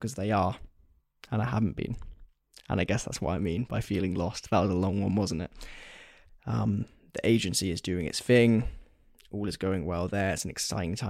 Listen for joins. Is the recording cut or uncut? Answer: cut